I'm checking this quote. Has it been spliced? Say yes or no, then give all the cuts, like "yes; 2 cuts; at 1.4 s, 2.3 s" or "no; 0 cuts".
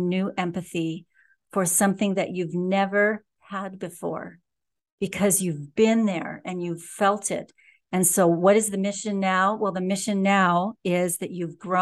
no; 0 cuts